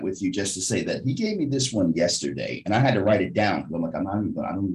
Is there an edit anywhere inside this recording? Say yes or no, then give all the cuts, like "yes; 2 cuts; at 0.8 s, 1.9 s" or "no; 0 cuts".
no; 0 cuts